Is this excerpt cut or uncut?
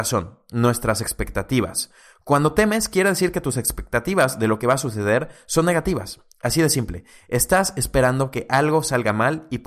uncut